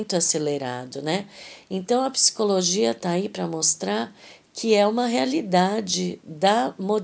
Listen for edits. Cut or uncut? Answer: uncut